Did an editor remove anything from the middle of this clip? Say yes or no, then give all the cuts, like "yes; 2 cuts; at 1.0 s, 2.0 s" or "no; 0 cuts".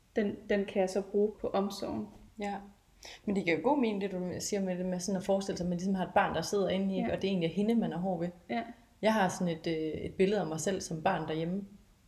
yes; 1 cut; at 1.3 s